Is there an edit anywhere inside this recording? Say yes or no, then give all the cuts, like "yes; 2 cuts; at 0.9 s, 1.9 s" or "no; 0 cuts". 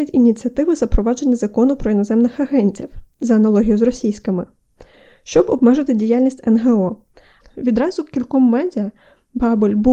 yes; 1 cut; at 7.4 s